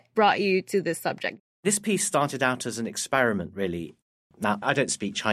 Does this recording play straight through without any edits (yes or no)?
no